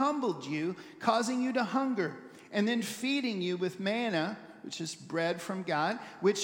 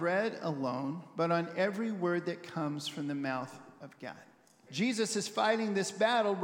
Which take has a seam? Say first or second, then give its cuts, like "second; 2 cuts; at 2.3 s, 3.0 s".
second; 1 cut; at 4.7 s